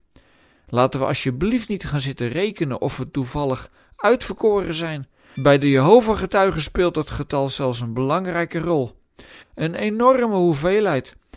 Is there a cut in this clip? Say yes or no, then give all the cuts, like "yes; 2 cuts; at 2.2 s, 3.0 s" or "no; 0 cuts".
yes; 2 cuts; at 5.4 s, 9.4 s